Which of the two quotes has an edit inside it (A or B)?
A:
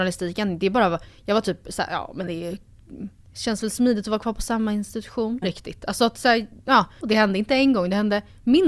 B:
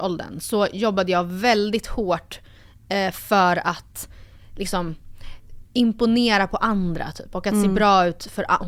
A